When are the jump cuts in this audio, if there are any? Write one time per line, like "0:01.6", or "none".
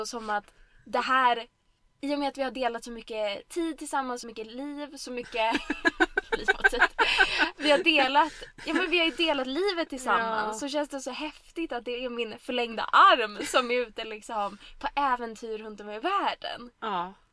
none